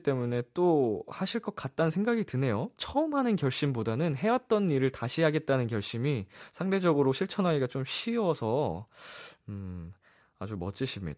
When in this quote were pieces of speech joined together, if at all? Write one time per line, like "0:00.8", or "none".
none